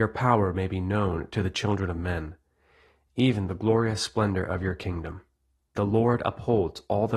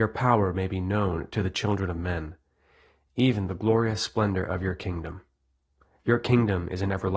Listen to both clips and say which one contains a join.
first; 1 cut; at 5.7 s

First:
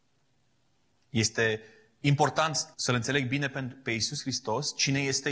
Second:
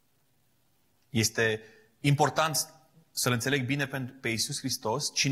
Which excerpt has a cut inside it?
first; 1 cut; at 2.7 s

